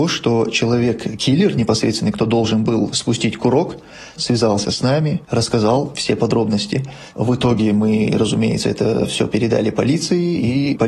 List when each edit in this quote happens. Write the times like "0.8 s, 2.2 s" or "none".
4.2 s